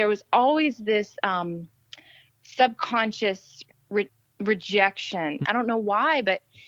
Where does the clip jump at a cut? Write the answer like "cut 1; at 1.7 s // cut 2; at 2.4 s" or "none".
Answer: cut 1; at 5.4 s